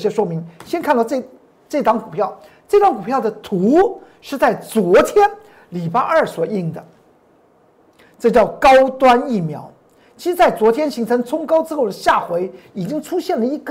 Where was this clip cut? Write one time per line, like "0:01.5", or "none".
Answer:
none